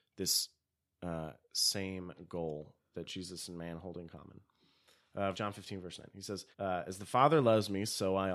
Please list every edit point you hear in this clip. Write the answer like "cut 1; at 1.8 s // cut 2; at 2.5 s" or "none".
cut 1; at 5.3 s // cut 2; at 6.5 s